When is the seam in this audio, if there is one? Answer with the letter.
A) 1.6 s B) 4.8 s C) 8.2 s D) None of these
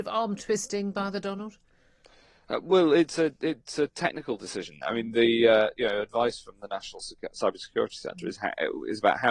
D